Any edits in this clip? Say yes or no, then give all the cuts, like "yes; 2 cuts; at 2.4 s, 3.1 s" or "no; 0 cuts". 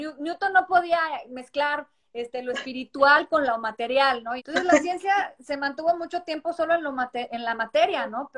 yes; 1 cut; at 4.4 s